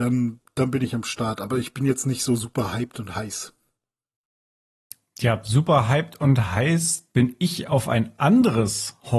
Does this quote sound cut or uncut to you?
uncut